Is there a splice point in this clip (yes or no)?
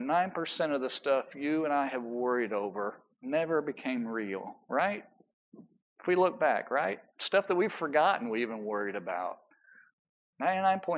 no